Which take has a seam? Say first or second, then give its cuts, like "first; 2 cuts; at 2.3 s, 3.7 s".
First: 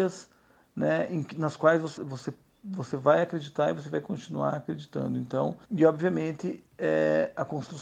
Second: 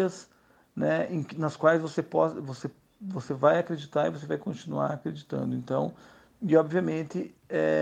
first; 2 cuts; at 2.0 s, 5.6 s